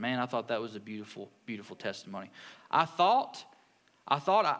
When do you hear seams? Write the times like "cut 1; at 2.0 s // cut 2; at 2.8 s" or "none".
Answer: cut 1; at 2.5 s